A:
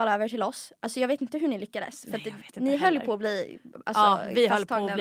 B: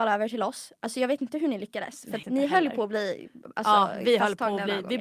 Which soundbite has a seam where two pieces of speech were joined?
B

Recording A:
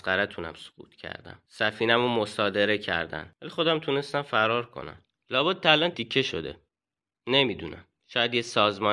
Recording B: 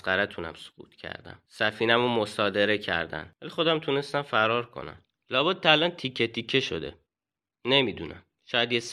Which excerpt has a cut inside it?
A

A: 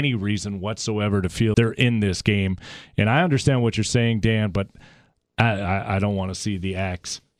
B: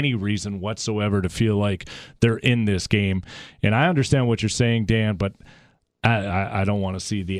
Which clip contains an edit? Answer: A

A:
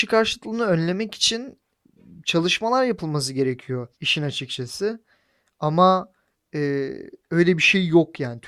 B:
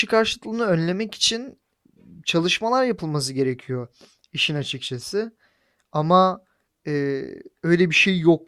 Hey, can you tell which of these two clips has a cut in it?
A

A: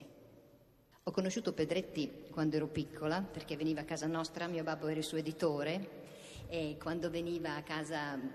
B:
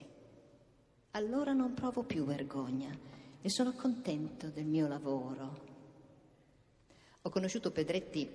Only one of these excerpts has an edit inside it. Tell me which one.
A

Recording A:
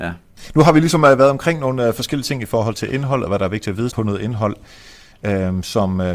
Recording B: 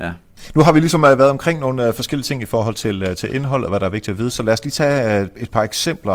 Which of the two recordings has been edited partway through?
A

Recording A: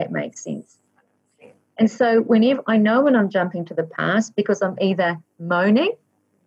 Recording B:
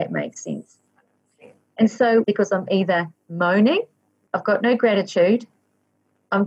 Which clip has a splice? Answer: B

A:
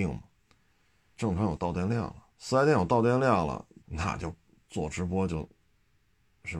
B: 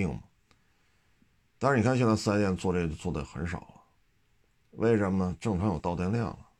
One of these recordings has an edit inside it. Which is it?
A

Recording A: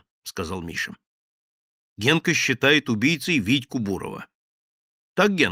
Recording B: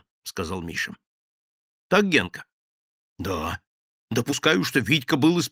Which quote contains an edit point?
B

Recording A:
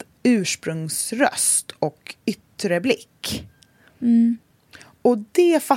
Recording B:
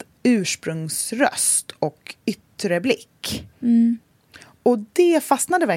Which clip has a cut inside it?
B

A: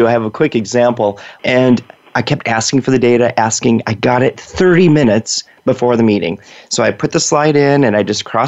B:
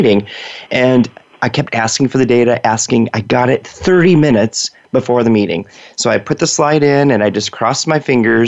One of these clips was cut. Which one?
A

